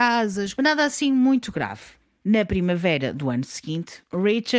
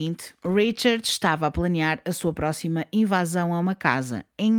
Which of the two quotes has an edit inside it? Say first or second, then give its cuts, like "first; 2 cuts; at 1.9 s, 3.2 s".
first; 1 cut; at 2.2 s